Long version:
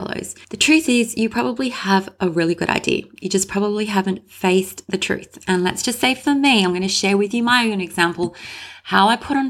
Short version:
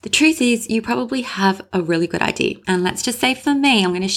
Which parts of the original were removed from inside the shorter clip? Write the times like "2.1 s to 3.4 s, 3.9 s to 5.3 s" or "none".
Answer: 3.1 s to 5.4 s